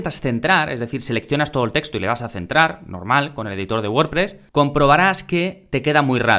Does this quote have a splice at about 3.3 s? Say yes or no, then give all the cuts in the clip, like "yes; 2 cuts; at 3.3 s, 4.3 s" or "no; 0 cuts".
no; 0 cuts